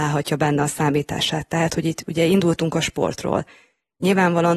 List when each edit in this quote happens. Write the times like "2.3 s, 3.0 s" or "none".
none